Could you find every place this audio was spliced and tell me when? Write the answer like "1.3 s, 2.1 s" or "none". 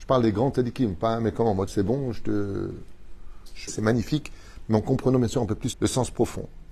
1.7 s, 3.7 s, 5.7 s